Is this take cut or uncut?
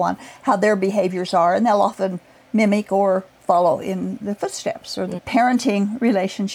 cut